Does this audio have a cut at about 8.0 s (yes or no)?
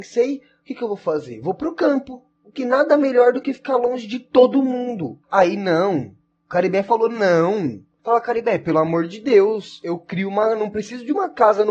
yes